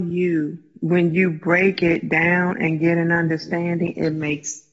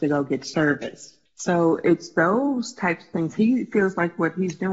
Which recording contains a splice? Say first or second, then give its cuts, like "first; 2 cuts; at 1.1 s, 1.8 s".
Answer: second; 1 cut; at 1.3 s